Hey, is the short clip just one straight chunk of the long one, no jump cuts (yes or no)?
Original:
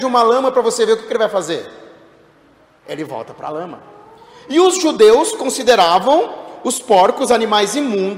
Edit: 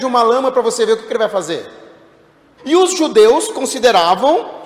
no